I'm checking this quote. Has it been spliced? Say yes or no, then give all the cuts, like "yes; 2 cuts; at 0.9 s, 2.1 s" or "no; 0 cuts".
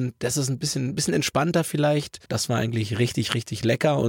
yes; 1 cut; at 2.3 s